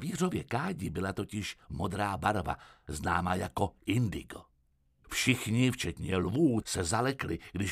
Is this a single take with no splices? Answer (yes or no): no